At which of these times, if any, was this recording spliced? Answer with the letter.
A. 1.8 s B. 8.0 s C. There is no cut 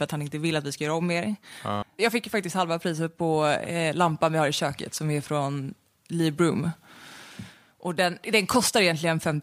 A